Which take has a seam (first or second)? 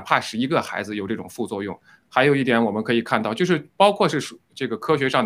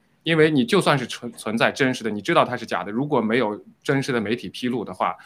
first